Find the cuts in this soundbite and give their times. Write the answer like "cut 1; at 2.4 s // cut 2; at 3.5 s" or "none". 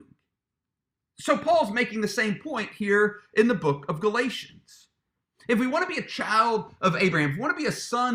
none